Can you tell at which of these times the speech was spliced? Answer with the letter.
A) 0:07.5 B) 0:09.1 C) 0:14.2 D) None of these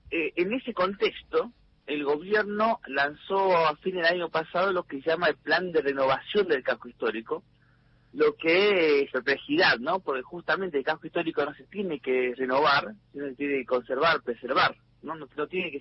B